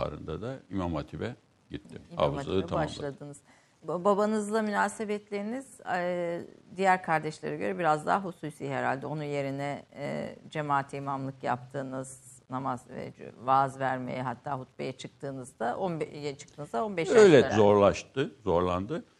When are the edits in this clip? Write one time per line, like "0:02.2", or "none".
0:03.8
0:17.5